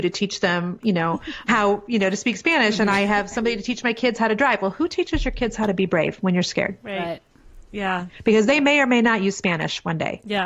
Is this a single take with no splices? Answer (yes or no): yes